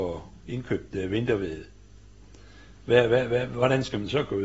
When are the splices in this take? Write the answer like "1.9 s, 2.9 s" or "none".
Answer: none